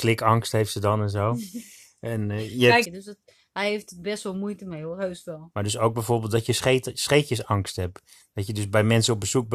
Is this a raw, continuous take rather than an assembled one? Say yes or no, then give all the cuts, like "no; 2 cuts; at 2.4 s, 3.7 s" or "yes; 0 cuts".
no; 2 cuts; at 2.8 s, 5.5 s